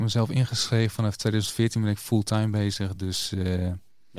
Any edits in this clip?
no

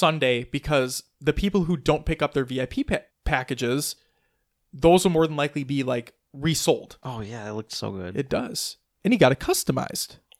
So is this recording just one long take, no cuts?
no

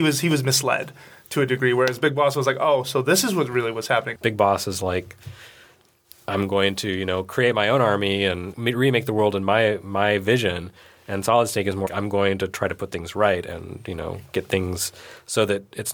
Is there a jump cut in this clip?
yes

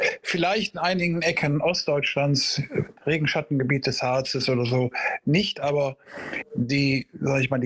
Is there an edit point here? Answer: no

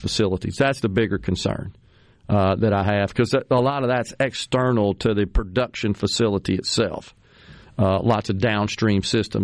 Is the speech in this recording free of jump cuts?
yes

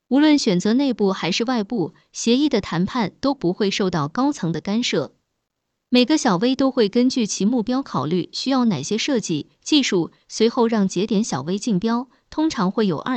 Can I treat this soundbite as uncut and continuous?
no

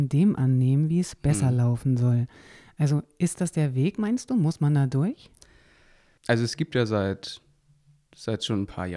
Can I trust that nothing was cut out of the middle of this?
yes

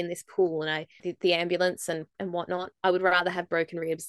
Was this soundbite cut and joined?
yes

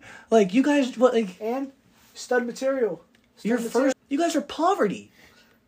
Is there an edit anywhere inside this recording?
yes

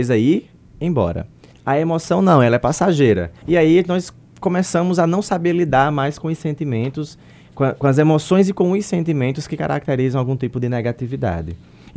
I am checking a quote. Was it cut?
yes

